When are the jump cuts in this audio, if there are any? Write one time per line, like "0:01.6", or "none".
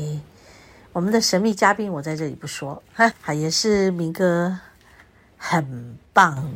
0:03.1

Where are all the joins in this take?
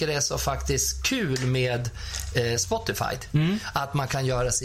none

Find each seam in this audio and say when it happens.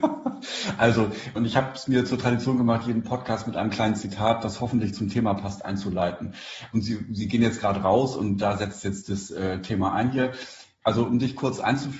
0:01.4
0:06.7
0:10.8

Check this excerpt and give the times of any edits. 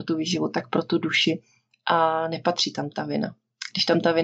none

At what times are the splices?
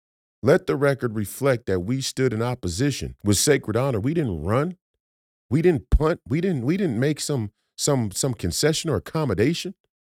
0:03.2

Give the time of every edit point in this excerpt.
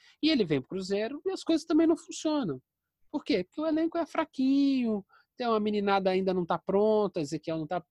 none

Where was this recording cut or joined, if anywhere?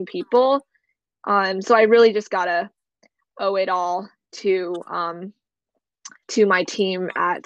none

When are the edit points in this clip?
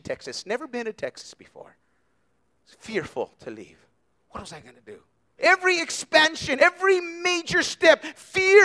0:05.4
0:06.6

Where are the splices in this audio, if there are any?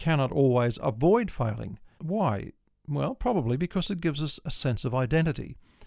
0:02.0

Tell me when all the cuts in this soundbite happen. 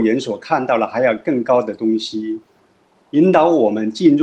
0:02.9

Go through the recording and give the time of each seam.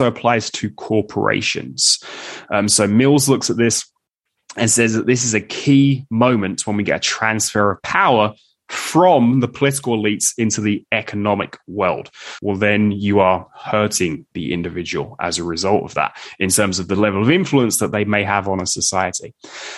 0:12.4

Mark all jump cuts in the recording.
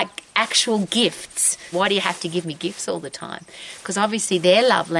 0:01.7

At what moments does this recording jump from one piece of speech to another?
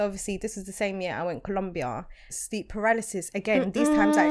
0:02.3

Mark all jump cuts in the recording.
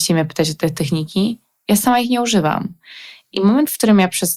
none

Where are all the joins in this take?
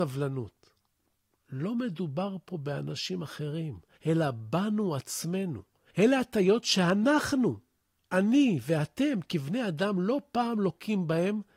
0:01.4

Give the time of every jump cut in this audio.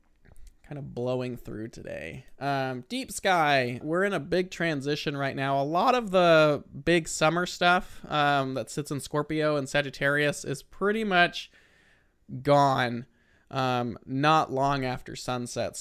0:03.8

